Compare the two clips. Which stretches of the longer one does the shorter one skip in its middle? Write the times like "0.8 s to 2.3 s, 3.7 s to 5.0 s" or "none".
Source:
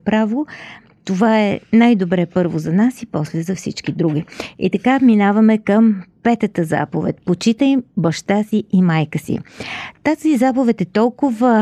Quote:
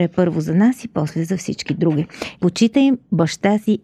4.6 s to 7.2 s